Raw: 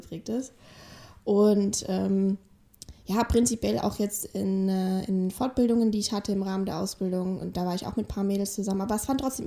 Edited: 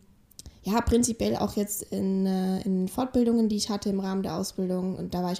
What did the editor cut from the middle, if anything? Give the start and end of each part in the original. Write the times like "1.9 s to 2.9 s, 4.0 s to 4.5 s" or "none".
none